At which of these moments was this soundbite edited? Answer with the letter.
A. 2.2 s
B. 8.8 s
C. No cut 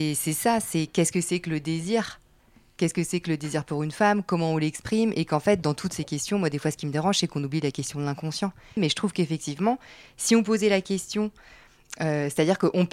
B